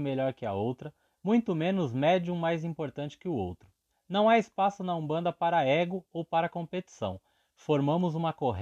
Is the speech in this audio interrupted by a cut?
yes; 1 cut; at 3.9 s

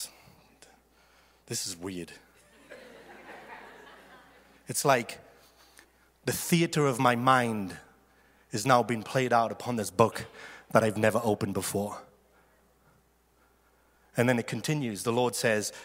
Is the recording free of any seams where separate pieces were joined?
yes; 0 cuts

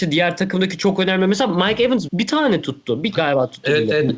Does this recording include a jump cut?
yes; 2 cuts; at 2.1 s, 3.2 s

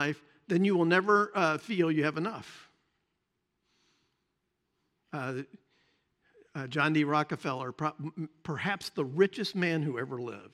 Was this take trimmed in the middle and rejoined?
no; 0 cuts

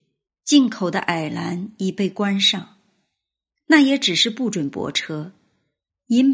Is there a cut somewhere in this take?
no; 0 cuts

